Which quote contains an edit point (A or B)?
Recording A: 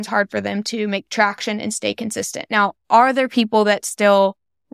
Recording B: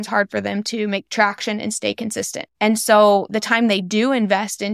B